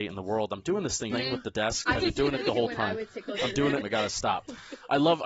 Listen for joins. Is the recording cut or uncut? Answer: cut